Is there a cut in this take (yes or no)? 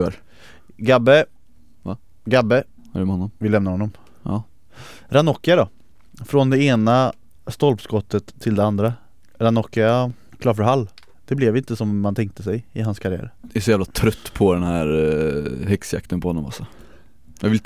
no